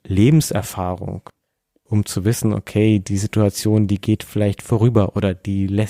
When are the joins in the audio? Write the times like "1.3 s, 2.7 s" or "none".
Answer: none